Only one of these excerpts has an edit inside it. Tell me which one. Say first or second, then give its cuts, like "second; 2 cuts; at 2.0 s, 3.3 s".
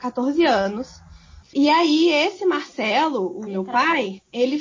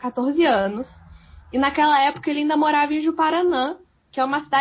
first; 2 cuts; at 1.4 s, 3.5 s